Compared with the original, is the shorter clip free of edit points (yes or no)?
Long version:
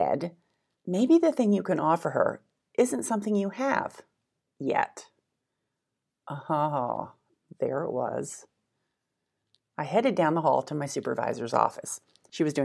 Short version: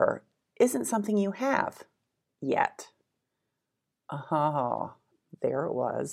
yes